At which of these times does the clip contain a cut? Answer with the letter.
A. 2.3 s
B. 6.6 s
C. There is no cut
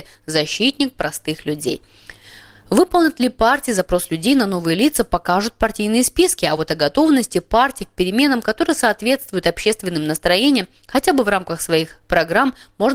C